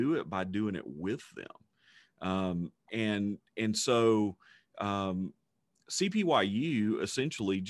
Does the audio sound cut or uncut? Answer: uncut